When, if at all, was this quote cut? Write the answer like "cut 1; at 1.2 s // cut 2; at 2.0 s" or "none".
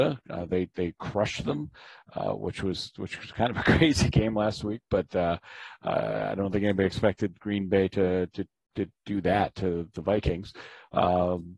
none